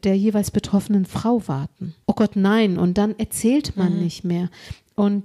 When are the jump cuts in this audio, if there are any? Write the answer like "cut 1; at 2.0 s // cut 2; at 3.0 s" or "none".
cut 1; at 2.0 s